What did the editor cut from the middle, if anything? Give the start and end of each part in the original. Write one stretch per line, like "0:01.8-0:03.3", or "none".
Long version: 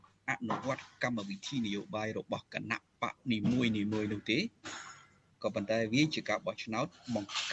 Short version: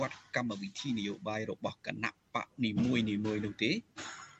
none